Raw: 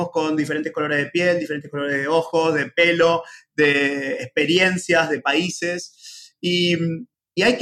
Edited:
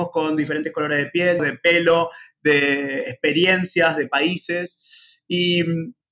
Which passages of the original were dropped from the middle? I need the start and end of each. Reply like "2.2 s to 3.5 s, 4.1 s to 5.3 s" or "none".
1.4 s to 2.5 s